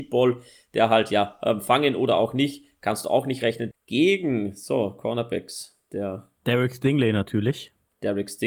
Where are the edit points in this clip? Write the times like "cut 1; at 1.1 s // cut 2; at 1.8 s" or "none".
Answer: cut 1; at 3.7 s // cut 2; at 6.4 s

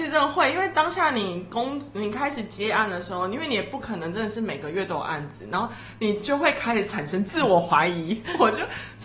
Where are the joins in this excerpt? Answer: none

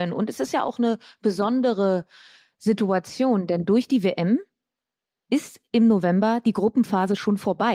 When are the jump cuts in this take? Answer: none

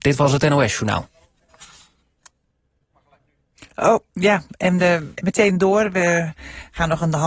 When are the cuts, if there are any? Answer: cut 1; at 5.1 s

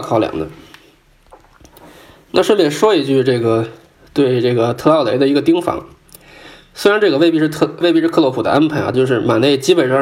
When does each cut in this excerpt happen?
cut 1; at 7.8 s // cut 2; at 8.9 s

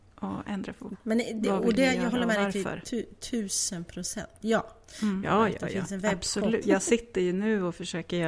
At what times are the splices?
cut 1; at 0.9 s // cut 2; at 5.2 s // cut 3; at 6.6 s

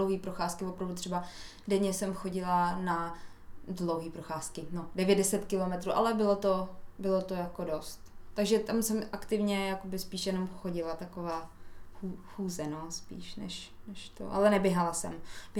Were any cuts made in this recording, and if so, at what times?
none

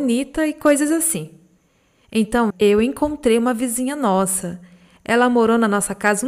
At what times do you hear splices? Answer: cut 1; at 2.5 s

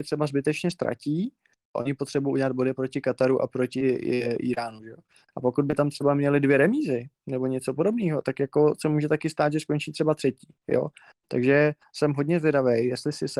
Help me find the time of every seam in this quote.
cut 1; at 1.8 s

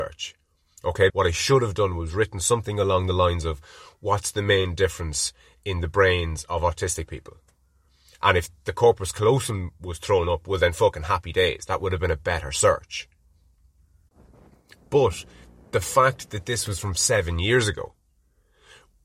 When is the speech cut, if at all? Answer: cut 1; at 1.1 s

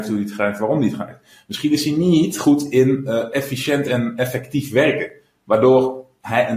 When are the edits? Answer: none

